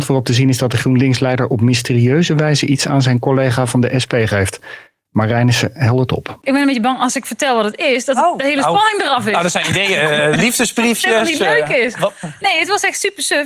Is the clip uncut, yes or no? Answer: no